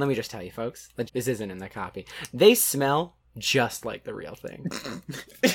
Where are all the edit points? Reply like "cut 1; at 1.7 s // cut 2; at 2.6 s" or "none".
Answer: cut 1; at 1.1 s